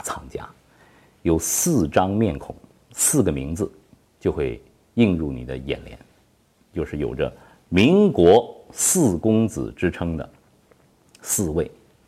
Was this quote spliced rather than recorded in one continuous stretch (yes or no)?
no